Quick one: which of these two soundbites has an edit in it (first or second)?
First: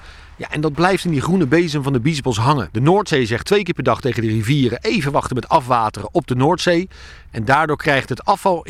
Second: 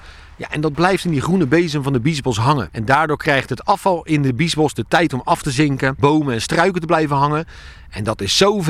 second